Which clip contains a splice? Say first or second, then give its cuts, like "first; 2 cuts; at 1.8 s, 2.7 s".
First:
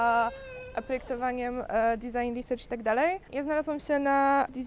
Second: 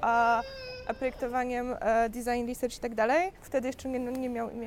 second; 1 cut; at 3.4 s